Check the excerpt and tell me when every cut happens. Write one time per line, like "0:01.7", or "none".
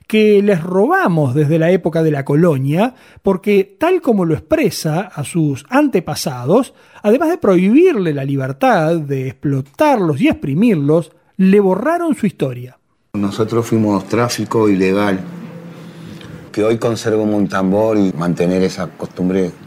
0:13.1
0:16.5
0:18.1